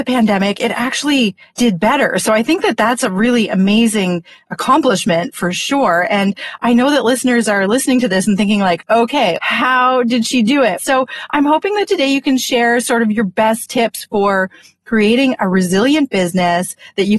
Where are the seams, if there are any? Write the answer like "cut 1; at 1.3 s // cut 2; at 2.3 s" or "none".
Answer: cut 1; at 9.4 s // cut 2; at 10.8 s